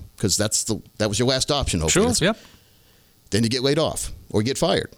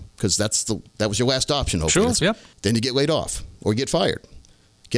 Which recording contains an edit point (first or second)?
second